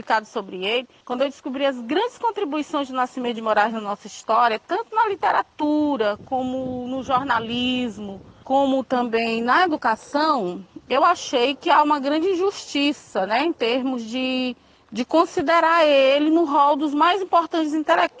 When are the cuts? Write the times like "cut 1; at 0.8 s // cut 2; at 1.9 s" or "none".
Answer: none

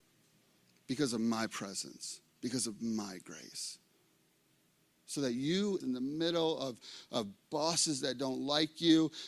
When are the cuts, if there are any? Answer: cut 1; at 2.3 s // cut 2; at 5.8 s

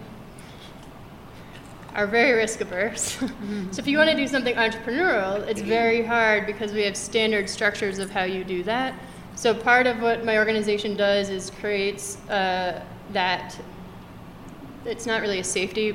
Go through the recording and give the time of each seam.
none

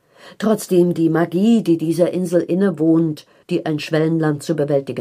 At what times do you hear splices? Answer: cut 1; at 3.4 s

